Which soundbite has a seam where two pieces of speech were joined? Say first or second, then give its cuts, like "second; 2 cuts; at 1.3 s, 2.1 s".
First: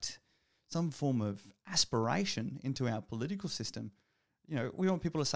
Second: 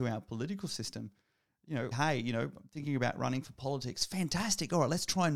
second; 1 cut; at 1.9 s